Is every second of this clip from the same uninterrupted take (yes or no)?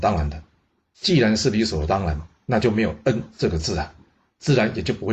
yes